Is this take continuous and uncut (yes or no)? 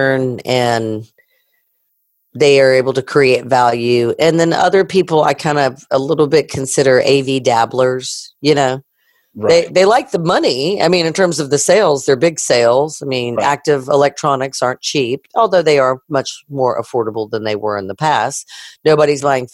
yes